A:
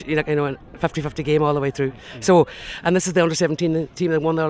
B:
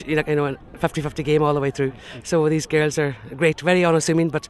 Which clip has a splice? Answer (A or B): B